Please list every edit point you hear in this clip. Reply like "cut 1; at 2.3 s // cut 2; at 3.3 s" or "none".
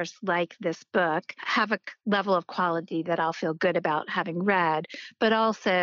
none

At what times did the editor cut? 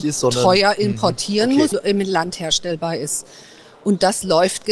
cut 1; at 1.7 s

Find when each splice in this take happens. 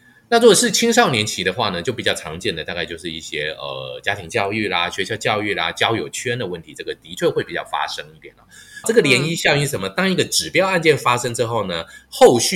cut 1; at 8.8 s

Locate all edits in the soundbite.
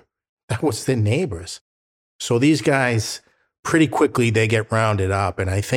none

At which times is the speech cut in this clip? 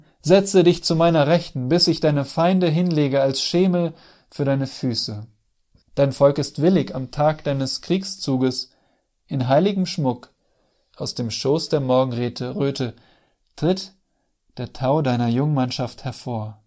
cut 1; at 5.8 s

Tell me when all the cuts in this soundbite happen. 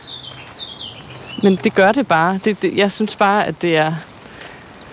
cut 1; at 1.6 s

